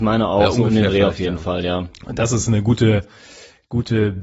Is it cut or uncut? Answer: uncut